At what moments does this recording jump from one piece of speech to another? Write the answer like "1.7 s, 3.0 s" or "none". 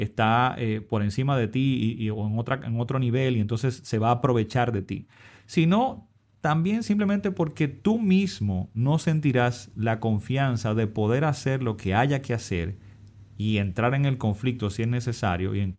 none

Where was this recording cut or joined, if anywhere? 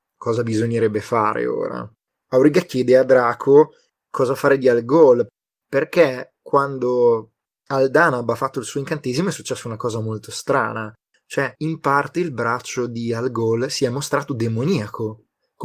none

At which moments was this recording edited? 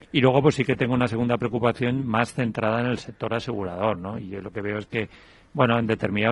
none

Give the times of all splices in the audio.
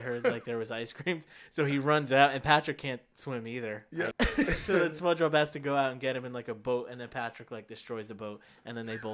4.1 s

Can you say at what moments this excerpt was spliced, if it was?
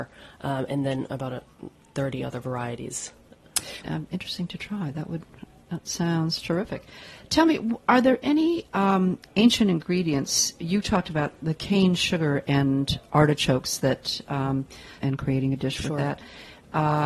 3.8 s, 15.0 s

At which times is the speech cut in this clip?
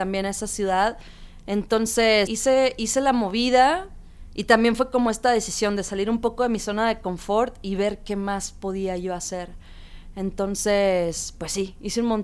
2.3 s

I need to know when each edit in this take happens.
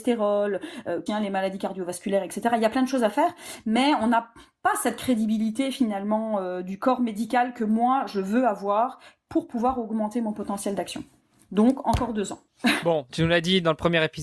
1.1 s

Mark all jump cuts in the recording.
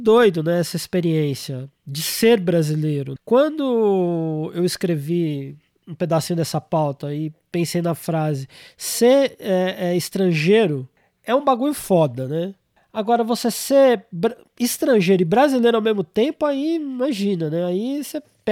3.2 s

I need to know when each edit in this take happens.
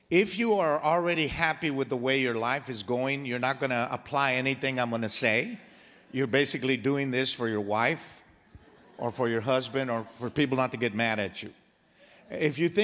none

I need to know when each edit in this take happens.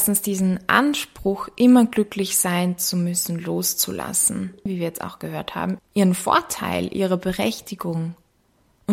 4.7 s, 5.8 s

